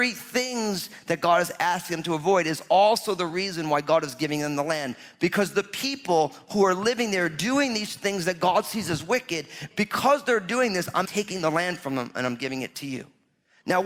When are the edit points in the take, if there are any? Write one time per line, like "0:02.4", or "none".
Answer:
0:09.7
0:11.0